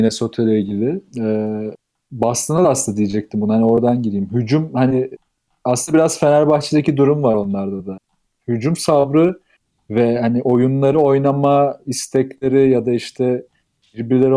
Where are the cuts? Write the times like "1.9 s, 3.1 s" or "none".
none